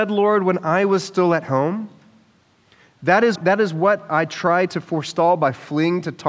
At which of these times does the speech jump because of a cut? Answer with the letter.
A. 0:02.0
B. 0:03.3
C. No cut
B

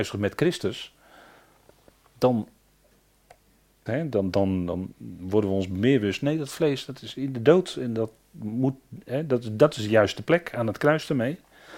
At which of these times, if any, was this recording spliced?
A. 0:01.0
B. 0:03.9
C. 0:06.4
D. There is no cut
B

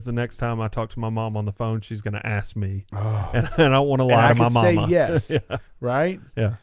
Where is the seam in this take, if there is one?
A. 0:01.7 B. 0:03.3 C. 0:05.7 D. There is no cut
D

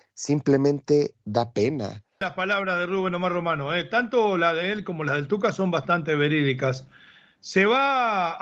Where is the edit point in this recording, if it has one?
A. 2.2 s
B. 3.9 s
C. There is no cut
A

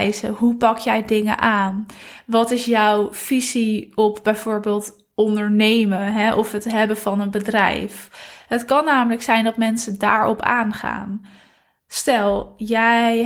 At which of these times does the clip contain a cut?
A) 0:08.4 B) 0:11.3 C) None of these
C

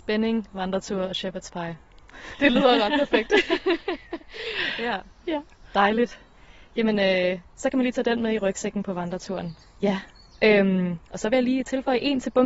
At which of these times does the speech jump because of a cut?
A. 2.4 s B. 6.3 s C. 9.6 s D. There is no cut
C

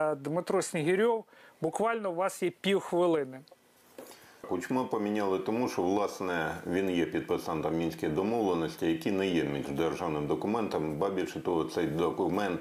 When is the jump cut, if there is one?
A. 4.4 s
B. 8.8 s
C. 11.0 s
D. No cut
A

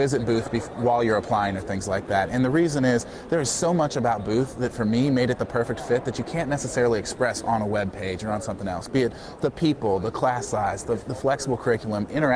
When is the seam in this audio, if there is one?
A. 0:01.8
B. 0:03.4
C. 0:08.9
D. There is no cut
D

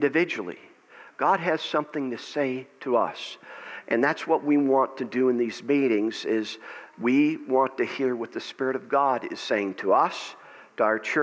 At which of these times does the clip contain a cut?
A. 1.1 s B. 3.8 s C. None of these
C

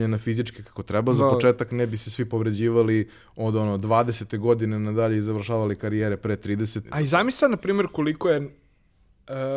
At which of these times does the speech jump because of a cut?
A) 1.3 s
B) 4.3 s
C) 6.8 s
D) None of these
C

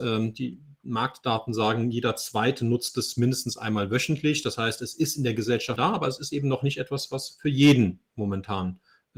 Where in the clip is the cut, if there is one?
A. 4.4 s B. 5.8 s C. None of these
B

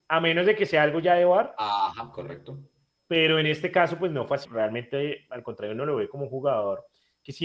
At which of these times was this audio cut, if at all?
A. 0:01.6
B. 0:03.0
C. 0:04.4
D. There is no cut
C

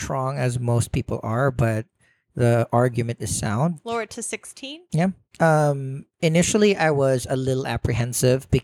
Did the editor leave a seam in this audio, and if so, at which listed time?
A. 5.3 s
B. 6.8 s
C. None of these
C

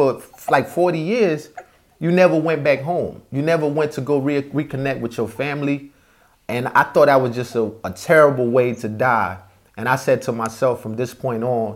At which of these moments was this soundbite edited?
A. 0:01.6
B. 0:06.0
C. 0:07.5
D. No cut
D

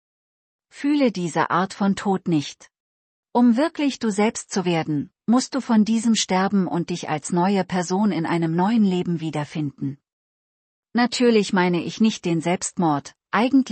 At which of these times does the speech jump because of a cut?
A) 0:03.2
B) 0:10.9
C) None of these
A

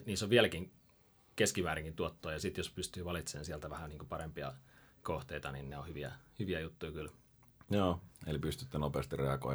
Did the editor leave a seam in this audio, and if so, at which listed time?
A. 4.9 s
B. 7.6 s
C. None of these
B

